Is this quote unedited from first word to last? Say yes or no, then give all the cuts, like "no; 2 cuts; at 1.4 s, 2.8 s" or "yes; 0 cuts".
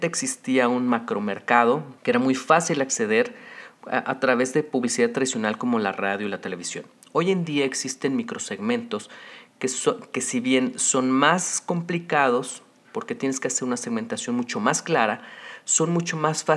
no; 1 cut; at 2.0 s